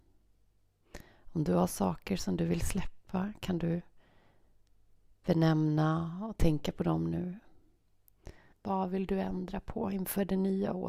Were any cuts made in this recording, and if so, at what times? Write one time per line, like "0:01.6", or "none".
0:08.5